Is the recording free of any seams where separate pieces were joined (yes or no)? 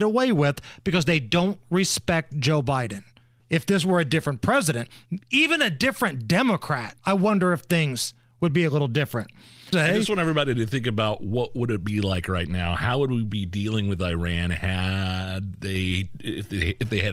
no